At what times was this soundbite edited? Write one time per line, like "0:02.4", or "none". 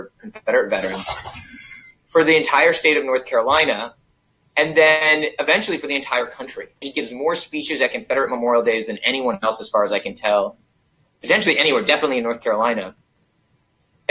0:06.8